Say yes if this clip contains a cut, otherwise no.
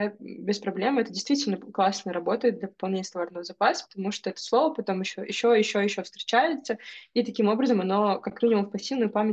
no